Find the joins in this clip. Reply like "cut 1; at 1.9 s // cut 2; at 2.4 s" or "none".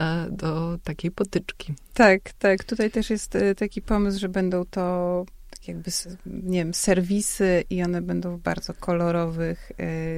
none